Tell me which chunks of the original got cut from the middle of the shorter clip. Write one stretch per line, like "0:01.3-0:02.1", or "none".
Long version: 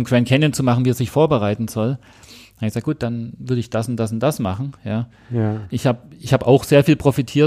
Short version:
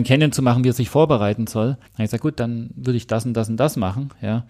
0:02.1-0:02.5